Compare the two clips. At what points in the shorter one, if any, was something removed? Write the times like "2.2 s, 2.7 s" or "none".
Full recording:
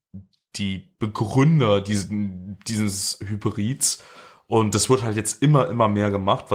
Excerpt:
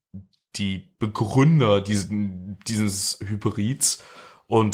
none